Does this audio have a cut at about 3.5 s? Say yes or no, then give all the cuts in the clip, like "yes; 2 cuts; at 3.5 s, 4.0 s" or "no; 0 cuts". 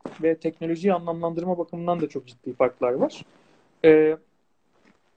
no; 0 cuts